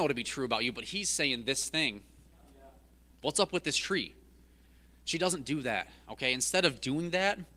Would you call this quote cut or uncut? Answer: uncut